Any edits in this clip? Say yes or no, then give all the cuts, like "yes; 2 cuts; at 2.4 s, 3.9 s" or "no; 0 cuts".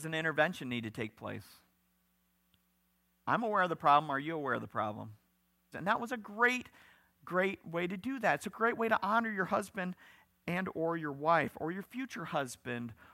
yes; 1 cut; at 5.7 s